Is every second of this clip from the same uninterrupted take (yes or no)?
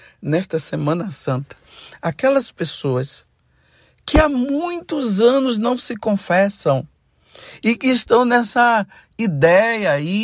yes